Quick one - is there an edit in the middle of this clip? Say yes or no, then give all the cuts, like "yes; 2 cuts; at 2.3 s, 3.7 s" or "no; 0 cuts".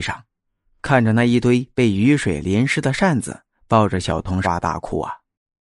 yes; 1 cut; at 4.4 s